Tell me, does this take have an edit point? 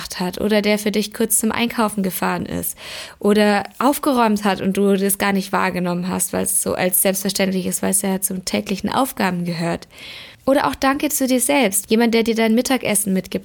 yes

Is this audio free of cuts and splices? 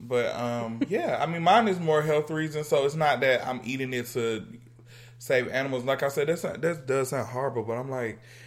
yes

